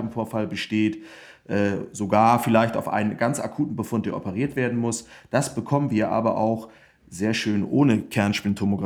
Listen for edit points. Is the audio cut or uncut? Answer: uncut